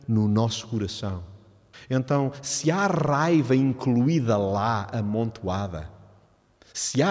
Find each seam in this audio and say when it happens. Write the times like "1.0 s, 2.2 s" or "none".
1.7 s